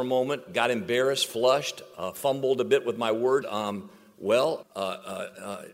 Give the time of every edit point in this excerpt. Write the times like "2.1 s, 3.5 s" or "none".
3.4 s, 4.6 s